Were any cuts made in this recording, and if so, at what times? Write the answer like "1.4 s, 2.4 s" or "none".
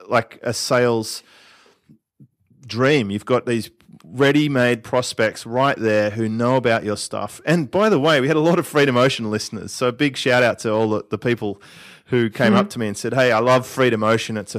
none